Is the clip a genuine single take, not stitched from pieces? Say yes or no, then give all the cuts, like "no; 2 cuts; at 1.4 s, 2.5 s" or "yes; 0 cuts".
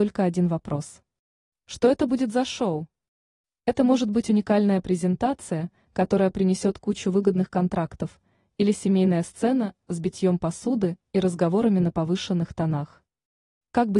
yes; 0 cuts